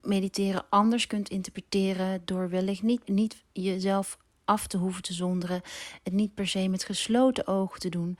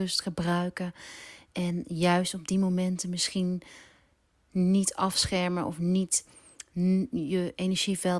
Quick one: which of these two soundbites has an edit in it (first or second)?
first